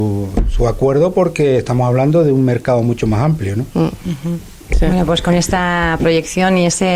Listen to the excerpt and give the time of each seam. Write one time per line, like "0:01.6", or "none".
none